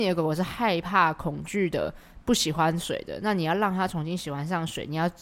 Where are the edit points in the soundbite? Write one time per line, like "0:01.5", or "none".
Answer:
none